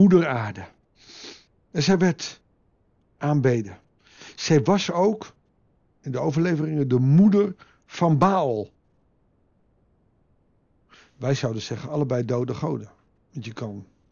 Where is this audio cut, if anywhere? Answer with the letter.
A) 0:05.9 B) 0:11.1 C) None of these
C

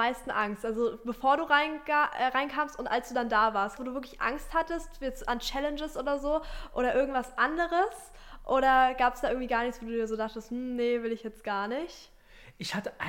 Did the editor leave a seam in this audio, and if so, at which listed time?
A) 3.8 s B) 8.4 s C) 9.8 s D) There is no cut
A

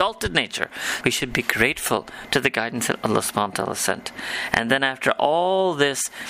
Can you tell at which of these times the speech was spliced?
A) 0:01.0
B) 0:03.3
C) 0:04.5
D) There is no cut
A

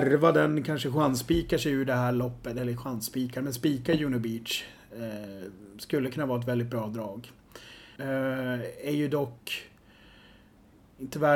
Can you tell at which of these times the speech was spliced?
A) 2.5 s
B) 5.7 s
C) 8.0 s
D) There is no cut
C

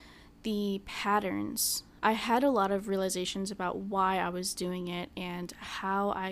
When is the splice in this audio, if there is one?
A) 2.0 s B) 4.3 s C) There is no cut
A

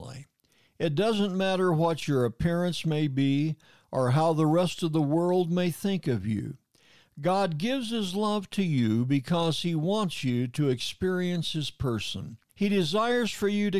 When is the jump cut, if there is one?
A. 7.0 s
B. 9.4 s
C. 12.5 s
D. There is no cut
C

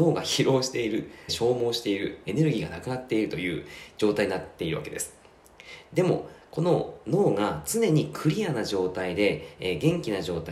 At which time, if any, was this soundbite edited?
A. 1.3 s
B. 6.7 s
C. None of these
A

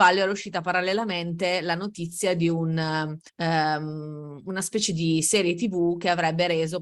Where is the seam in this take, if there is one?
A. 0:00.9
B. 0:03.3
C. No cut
B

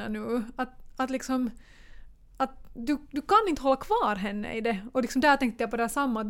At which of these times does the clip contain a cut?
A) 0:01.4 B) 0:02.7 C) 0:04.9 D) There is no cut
D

